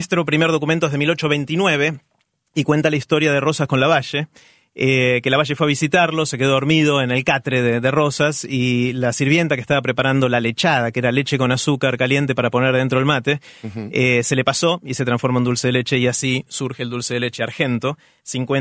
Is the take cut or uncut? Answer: uncut